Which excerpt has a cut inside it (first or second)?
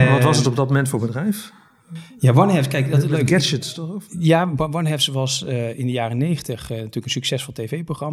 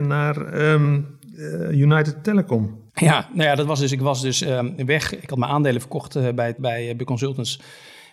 second